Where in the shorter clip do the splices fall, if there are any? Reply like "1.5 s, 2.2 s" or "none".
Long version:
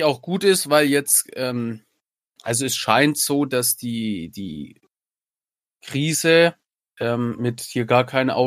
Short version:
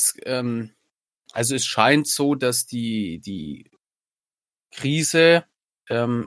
none